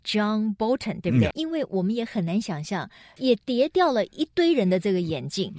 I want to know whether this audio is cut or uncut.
cut